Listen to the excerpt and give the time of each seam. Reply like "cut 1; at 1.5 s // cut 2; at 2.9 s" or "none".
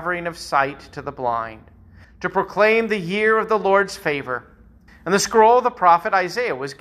cut 1; at 2.0 s // cut 2; at 4.9 s